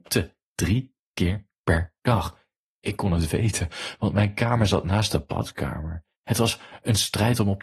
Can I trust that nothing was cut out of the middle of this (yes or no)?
no